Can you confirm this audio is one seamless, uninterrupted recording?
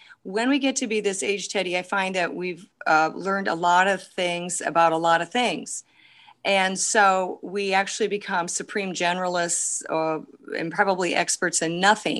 yes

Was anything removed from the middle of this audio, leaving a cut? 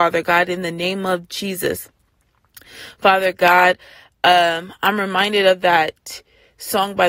no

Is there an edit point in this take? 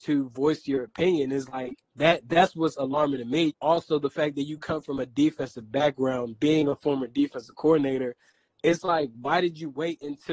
yes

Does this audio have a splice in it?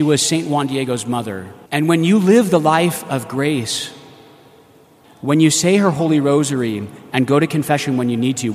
yes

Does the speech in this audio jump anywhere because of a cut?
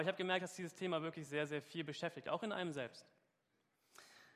no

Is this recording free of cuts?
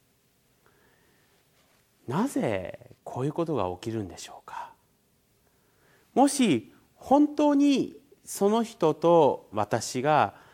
no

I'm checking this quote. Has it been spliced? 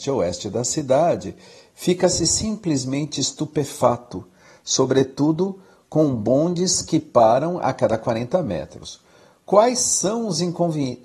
no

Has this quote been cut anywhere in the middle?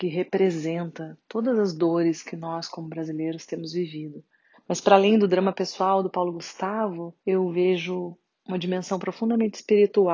yes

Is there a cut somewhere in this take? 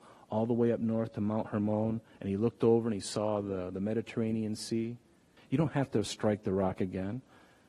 yes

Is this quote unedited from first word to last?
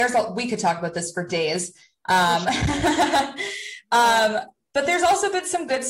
yes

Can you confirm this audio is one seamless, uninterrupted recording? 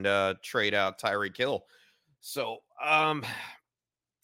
yes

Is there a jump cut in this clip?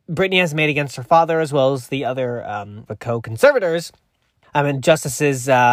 yes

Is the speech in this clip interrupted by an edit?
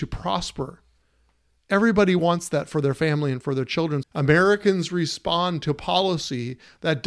yes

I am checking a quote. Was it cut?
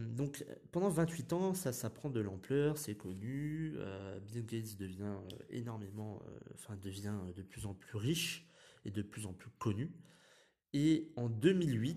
no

